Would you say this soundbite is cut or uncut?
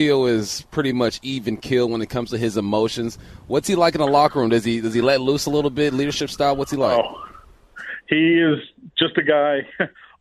uncut